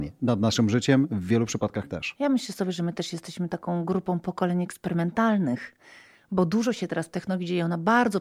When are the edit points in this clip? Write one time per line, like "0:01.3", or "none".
none